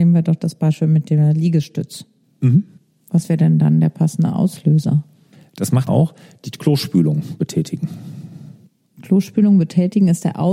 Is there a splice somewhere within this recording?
yes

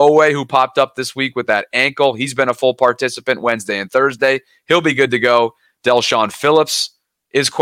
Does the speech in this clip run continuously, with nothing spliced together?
yes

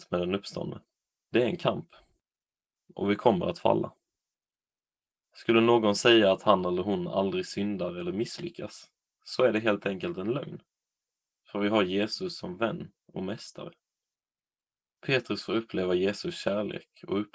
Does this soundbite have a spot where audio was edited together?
yes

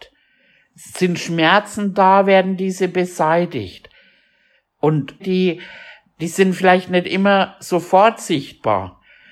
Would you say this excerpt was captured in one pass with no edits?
no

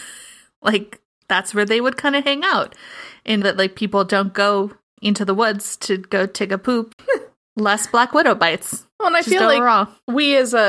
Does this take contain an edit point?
yes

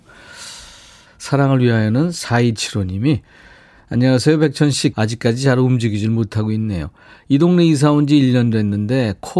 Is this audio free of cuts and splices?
no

